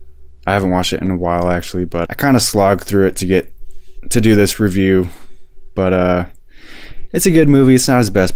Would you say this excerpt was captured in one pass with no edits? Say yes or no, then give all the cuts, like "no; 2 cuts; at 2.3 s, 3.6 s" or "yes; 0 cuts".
no; 1 cut; at 2.1 s